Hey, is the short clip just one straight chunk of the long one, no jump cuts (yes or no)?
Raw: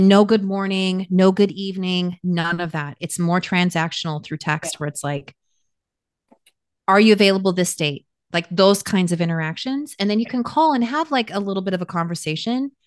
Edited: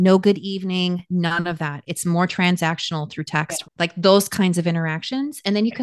no